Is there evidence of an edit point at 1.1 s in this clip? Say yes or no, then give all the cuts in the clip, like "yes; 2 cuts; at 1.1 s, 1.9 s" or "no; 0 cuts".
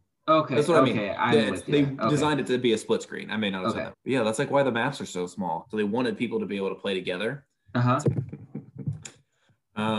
no; 3 cuts; at 3.9 s, 5.6 s, 8.0 s